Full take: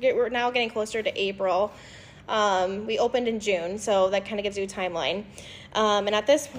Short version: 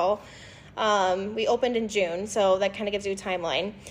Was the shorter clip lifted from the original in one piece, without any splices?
yes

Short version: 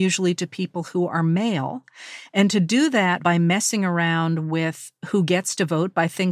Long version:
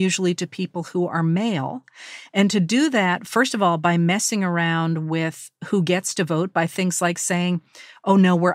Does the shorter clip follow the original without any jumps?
no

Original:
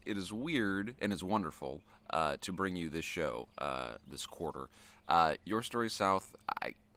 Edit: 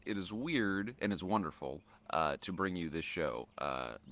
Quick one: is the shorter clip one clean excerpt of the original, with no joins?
yes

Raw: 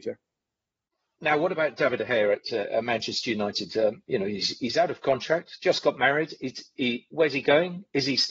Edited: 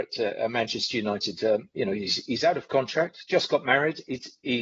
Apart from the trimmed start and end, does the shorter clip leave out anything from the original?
no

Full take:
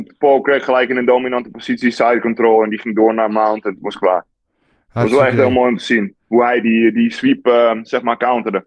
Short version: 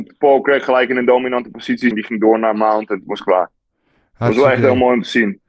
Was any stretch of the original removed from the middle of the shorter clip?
yes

